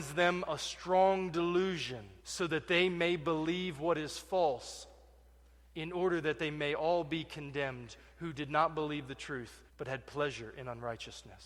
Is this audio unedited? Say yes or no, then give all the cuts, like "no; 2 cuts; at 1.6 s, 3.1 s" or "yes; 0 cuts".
no; 2 cuts; at 2.2 s, 9.7 s